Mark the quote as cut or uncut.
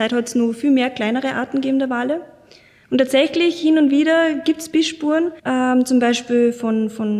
cut